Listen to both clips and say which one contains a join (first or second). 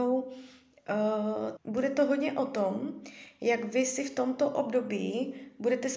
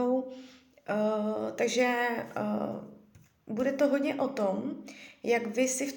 first